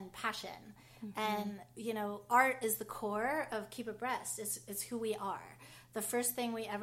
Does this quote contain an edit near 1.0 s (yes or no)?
no